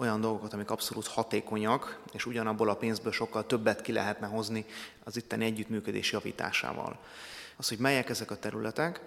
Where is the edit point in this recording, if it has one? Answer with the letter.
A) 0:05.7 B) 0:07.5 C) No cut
B